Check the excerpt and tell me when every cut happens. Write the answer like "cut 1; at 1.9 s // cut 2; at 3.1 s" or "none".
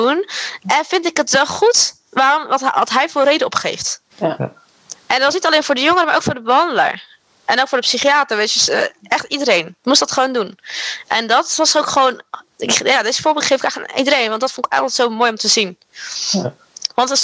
cut 1; at 4.1 s